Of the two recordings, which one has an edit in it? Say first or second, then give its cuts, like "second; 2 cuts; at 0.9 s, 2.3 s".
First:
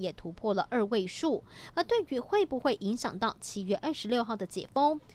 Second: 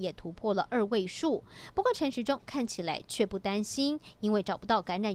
first; 1 cut; at 1.7 s